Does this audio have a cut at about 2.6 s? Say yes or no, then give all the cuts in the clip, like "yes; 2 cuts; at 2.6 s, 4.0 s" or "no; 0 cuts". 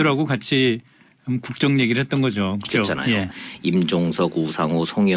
yes; 1 cut; at 2.6 s